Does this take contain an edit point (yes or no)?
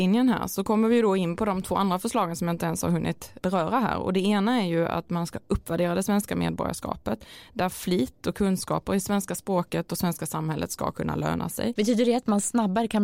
yes